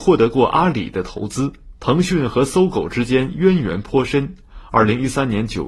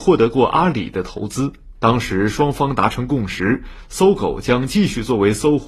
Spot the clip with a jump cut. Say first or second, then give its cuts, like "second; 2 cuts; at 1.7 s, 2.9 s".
second; 1 cut; at 1.8 s